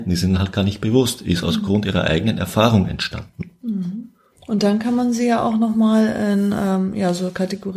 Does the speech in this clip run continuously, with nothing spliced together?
yes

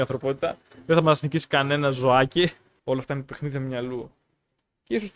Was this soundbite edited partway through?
yes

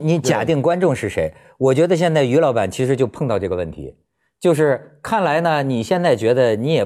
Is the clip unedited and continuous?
yes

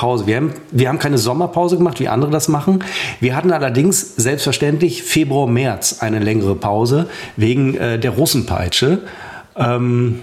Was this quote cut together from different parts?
no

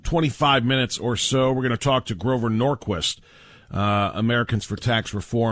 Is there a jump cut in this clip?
no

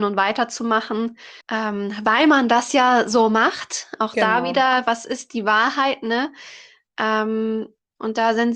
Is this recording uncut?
no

